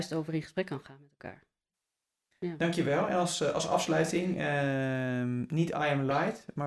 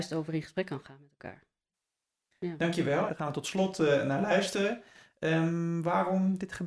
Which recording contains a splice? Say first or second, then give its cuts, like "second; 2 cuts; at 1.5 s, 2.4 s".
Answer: second; 1 cut; at 3.1 s